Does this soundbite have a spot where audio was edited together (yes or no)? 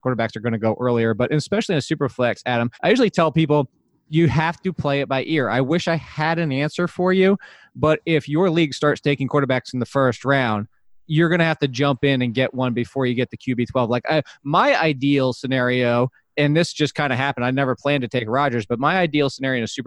yes